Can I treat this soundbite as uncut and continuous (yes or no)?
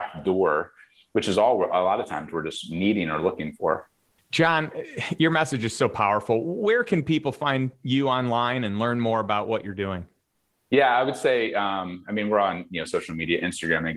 yes